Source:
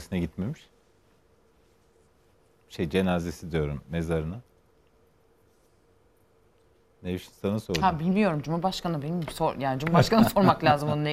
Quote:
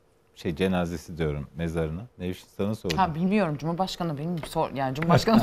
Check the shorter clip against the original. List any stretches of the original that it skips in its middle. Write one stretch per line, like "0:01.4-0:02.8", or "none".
0:04.5-0:07.0